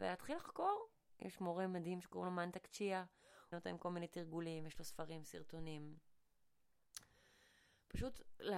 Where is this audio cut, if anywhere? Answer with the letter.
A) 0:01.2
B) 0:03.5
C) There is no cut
B